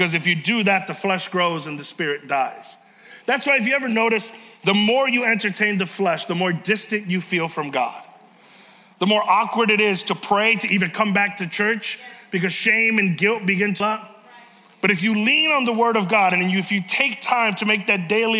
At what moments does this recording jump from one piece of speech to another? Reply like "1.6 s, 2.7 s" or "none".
13.8 s